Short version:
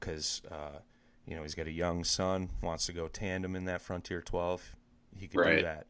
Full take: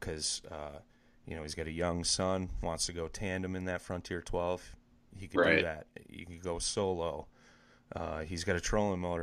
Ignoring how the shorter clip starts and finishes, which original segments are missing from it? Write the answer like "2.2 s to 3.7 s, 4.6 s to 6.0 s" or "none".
none